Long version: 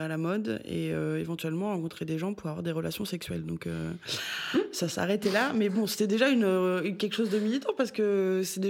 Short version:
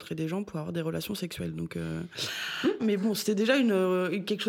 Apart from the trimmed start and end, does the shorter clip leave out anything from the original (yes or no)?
yes